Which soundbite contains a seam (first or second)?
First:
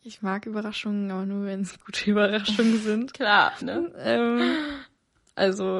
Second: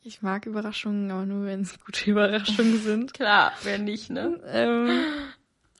first